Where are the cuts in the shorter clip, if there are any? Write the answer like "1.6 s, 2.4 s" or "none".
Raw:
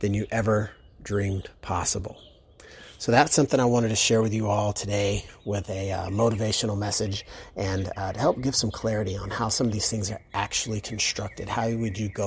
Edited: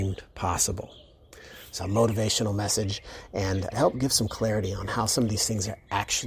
1.8 s, 3.7 s